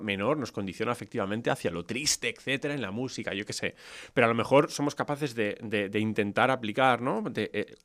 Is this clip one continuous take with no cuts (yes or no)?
yes